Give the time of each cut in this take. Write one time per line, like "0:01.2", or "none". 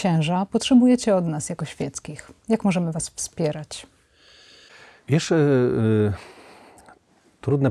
none